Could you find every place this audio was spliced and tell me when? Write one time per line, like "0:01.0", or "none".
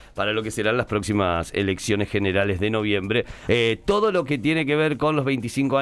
0:03.4